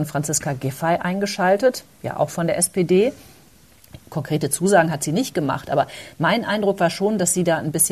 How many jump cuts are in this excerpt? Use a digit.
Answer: 1